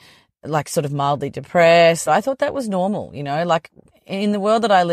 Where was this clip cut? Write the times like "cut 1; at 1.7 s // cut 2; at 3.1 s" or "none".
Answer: cut 1; at 2.1 s